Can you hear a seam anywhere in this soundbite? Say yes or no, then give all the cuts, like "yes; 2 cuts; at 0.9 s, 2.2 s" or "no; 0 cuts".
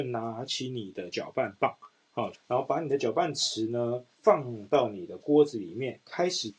yes; 2 cuts; at 2.3 s, 4.1 s